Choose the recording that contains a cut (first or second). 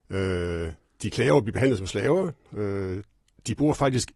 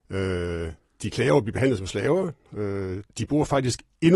second